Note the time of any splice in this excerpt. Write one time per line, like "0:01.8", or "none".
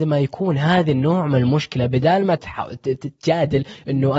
0:02.4